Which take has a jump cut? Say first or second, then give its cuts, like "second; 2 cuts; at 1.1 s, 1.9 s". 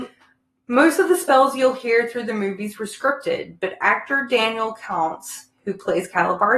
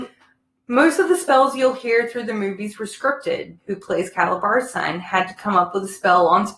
second; 1 cut; at 3.6 s